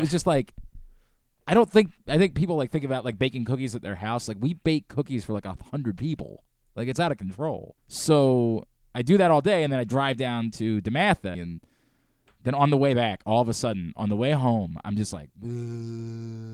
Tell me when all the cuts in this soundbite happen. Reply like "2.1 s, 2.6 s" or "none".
7.8 s, 11.3 s